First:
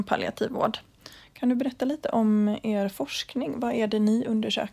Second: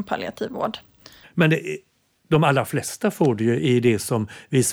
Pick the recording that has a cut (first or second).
second